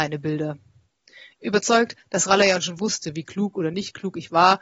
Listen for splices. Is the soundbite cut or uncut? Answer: uncut